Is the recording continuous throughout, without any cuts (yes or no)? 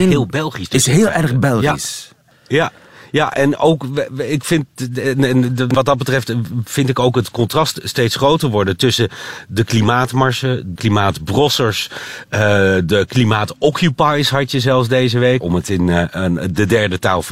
no